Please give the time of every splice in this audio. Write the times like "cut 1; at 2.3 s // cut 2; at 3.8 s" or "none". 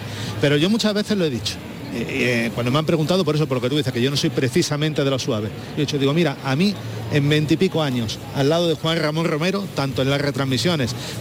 none